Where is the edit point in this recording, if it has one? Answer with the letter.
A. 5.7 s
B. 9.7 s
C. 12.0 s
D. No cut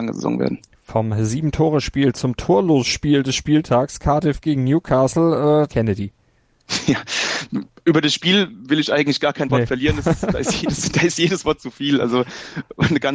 A